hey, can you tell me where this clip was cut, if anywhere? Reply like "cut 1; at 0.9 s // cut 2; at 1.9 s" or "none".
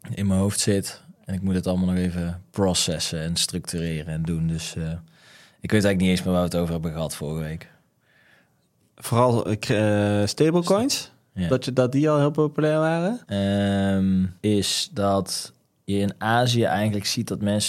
cut 1; at 13.2 s // cut 2; at 14.4 s

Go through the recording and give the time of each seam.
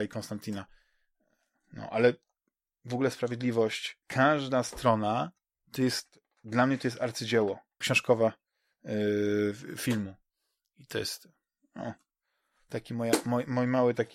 cut 1; at 4.0 s // cut 2; at 7.8 s

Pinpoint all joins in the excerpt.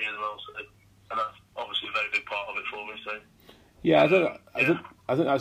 none

